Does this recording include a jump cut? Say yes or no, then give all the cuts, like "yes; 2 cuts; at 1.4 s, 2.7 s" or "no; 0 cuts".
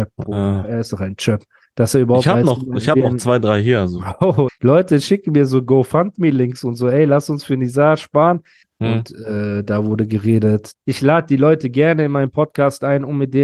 yes; 3 cuts; at 4.5 s, 8.6 s, 10.7 s